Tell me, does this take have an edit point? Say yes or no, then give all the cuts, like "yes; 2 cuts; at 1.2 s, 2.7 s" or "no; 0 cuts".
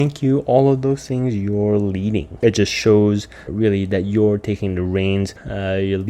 yes; 2 cuts; at 2.4 s, 3.5 s